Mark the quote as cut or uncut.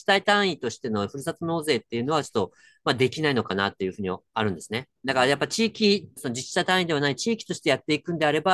cut